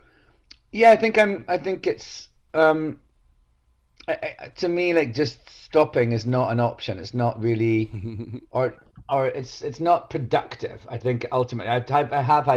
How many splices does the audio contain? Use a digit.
0